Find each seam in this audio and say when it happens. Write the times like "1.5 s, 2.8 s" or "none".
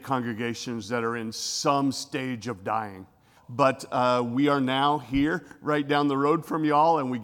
3.4 s